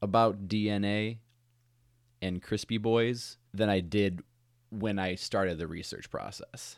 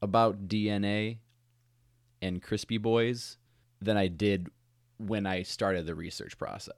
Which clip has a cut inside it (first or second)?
first